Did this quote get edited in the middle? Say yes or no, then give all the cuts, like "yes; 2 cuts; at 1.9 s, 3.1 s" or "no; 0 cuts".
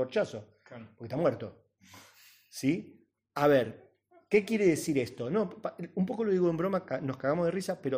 no; 0 cuts